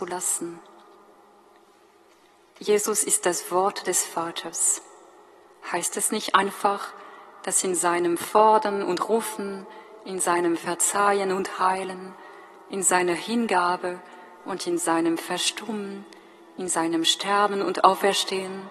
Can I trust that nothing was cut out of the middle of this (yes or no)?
yes